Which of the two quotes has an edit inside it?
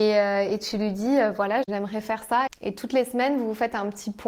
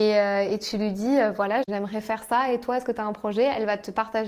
first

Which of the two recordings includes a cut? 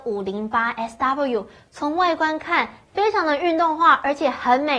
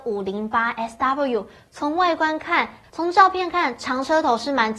second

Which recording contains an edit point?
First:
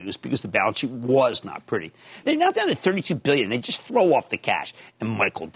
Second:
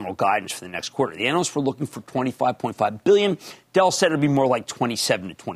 first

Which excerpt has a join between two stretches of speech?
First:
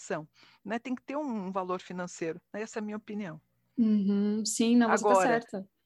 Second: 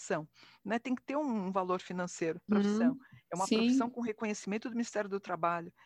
second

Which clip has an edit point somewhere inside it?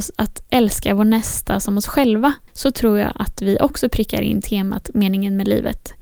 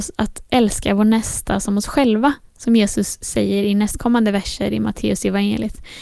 first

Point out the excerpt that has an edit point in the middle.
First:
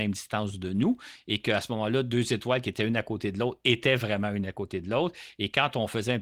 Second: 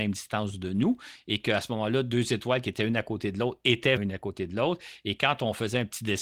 second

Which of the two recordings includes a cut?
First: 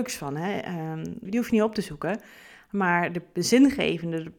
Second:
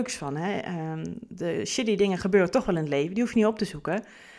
first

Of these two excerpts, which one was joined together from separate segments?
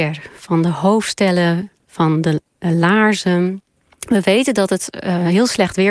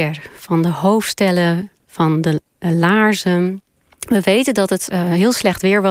second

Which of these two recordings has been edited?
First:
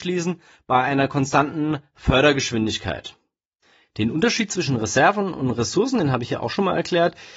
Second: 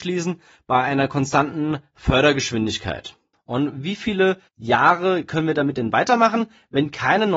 second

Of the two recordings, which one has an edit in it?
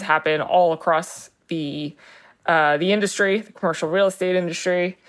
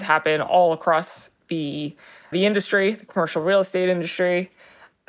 second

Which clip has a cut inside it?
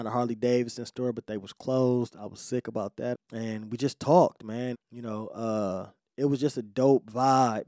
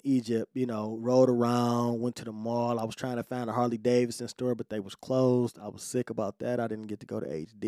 first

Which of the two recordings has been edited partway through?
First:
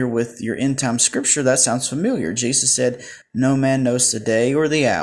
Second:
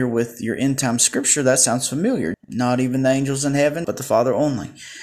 second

